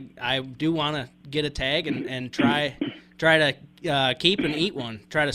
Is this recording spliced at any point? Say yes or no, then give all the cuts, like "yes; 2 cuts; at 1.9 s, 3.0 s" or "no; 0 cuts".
no; 0 cuts